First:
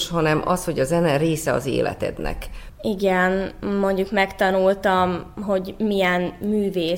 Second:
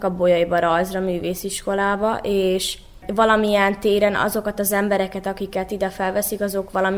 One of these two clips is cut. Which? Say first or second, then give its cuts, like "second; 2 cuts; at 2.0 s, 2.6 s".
first; 1 cut; at 2.7 s